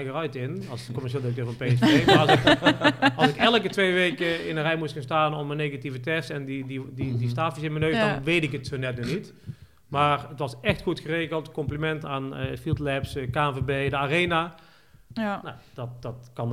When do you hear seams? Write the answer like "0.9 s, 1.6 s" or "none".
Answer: 12.0 s, 15.2 s